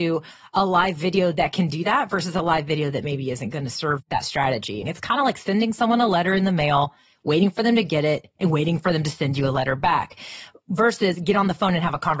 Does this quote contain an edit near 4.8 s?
yes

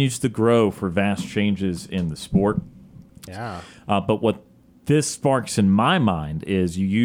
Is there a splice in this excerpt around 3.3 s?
yes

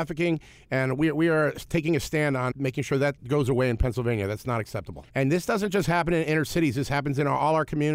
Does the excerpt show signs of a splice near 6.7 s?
no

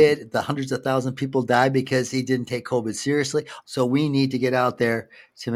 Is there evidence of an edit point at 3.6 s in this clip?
yes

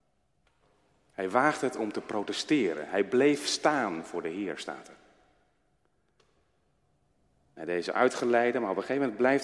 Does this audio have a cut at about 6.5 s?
no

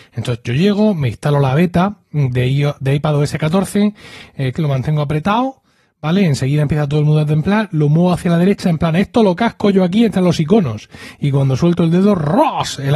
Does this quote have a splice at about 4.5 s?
yes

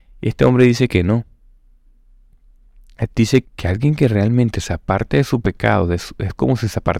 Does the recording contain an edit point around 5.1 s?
no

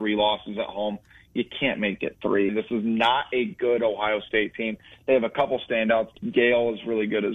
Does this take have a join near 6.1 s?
yes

